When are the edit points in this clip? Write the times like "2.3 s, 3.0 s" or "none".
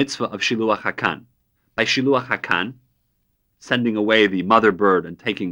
1.6 s